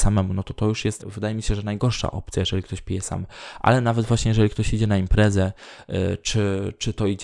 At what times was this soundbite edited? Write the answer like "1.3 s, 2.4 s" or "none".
1.0 s